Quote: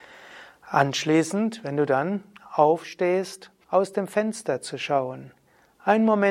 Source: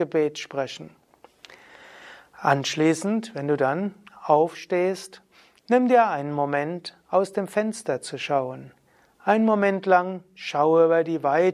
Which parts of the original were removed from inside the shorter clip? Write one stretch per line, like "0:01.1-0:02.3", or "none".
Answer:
0:05.3-0:07.0